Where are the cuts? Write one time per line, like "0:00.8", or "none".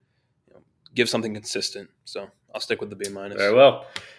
none